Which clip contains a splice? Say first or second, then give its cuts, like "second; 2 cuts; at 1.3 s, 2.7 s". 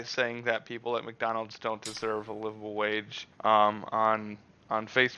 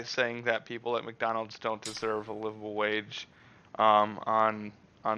first; 1 cut; at 3.3 s